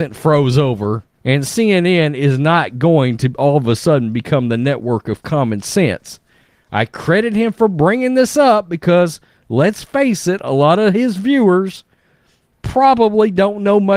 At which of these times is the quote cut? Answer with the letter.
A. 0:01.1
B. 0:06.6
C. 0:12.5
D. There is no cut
A